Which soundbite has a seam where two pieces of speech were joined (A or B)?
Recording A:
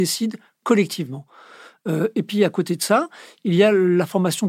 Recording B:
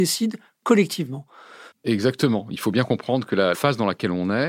B